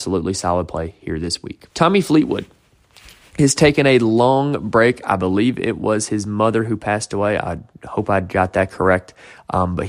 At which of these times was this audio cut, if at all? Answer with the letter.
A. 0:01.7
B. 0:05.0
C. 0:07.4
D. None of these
A